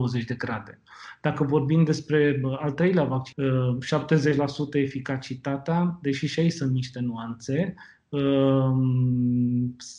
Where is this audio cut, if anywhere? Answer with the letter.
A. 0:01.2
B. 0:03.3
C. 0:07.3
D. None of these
B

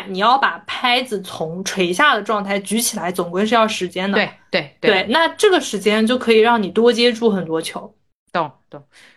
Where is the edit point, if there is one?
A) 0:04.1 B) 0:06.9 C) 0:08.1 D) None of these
D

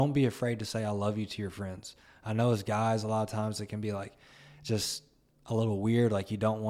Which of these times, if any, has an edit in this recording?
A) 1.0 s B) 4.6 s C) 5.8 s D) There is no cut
D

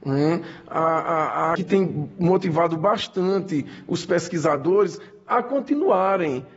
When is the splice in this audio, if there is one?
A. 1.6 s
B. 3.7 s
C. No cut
A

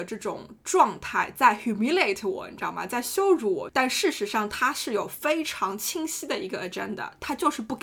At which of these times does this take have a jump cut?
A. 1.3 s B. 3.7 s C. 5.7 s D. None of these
B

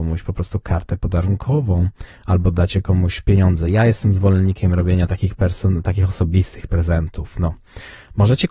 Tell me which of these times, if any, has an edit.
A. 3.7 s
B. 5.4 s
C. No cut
C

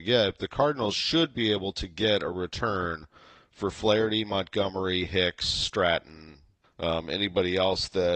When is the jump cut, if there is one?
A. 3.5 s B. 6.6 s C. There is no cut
B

